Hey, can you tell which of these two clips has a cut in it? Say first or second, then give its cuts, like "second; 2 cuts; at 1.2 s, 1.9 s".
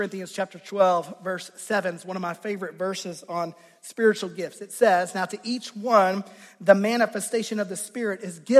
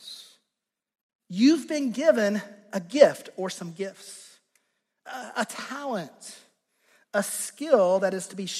second; 1 cut; at 1.2 s